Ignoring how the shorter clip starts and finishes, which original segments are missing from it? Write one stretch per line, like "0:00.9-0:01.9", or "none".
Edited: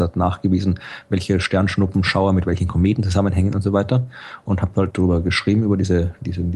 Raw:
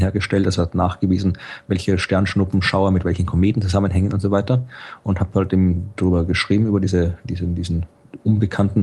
0:05.5-0:05.9

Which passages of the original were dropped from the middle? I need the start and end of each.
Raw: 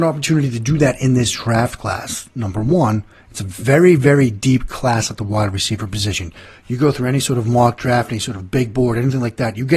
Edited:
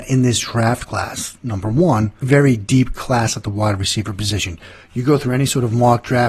0:03.1-0:04.0

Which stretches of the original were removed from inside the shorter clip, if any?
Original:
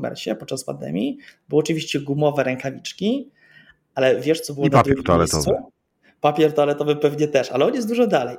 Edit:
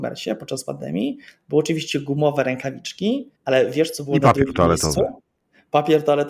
0:03.3-0:03.8

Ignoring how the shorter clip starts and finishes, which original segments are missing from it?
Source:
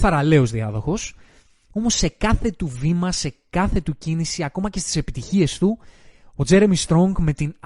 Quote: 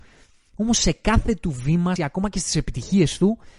0:03.1-0:04.4

